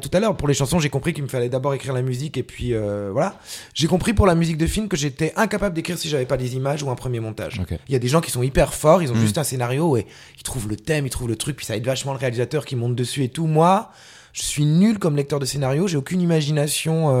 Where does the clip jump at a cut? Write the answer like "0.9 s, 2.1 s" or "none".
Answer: none